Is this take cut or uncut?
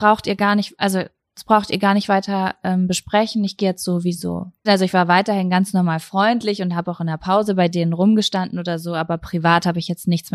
cut